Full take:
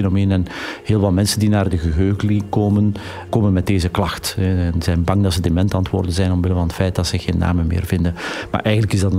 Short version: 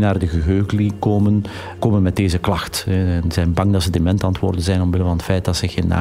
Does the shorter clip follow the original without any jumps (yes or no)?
yes